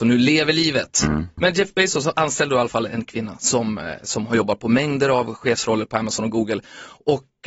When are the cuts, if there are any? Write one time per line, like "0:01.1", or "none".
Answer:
none